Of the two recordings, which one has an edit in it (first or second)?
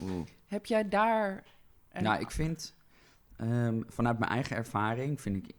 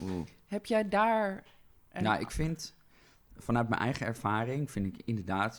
second